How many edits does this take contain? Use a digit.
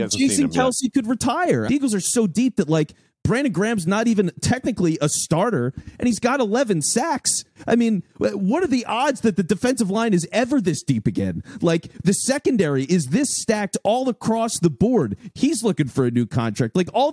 2